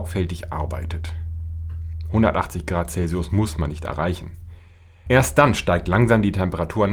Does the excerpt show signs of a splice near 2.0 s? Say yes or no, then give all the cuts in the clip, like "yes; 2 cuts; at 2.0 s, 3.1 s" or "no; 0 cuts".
no; 1 cut; at 5.1 s